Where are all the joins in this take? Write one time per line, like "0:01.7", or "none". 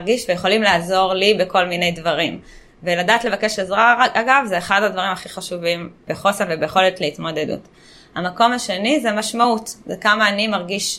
none